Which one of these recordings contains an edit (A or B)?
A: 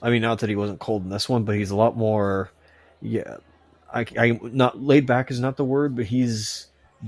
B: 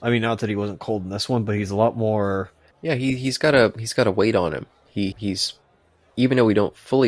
B